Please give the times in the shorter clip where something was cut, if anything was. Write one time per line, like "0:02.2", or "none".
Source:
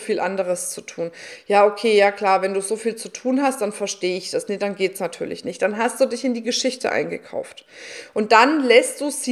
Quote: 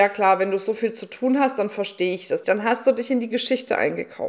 0:02.4

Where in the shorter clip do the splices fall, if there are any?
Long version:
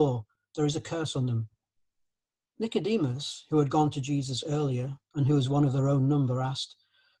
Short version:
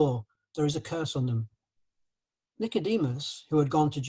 none

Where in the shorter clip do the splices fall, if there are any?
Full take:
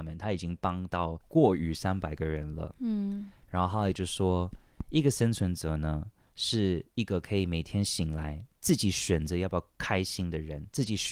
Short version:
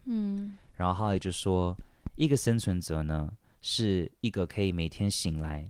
none

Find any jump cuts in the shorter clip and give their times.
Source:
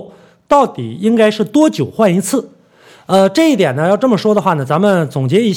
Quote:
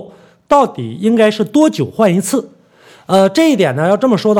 none

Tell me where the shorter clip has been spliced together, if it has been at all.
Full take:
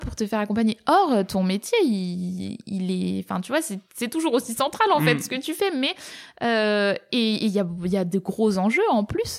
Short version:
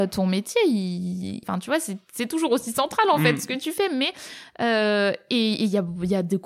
0:01.4

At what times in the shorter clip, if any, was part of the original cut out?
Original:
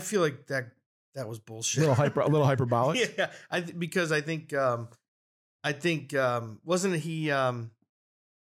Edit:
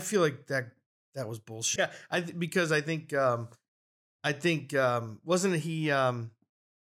0:01.8

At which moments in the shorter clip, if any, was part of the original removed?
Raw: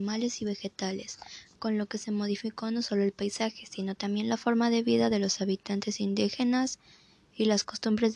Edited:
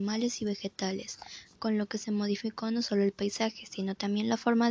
none

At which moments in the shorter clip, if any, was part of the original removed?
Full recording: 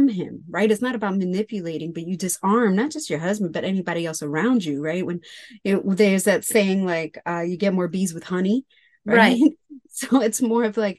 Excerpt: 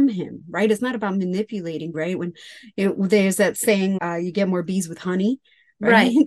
0:01.9
0:04.0

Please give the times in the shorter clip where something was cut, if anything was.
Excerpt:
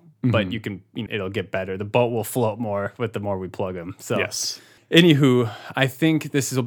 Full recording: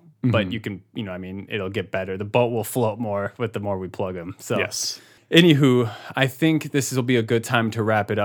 0:01.1

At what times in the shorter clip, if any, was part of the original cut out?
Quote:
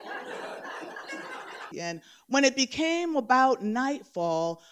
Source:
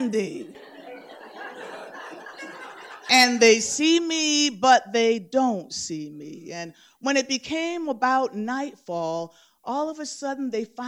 0:01.7

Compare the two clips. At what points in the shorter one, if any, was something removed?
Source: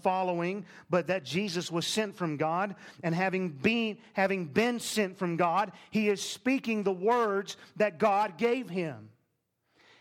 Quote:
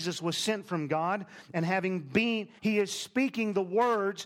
0:02.6

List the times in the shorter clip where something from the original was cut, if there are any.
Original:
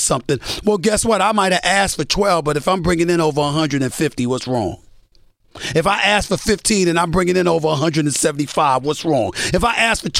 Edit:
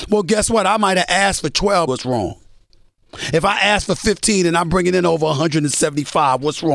0:01.9

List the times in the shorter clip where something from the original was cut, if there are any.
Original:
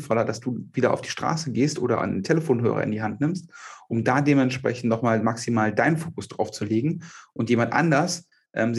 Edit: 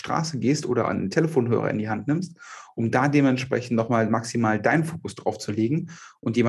none

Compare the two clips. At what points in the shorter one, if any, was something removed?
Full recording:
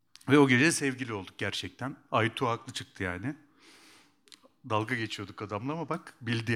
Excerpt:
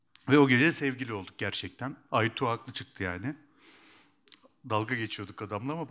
none

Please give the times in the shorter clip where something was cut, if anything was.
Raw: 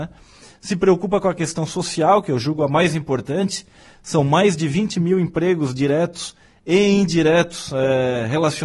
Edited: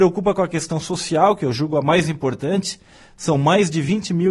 none

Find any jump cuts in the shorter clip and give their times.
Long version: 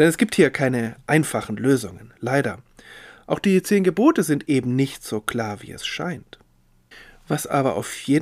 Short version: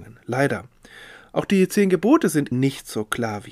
0:02.5

